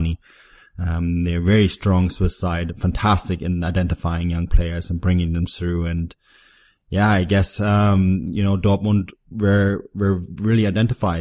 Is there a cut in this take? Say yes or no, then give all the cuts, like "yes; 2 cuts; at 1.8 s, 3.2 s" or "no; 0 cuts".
no; 0 cuts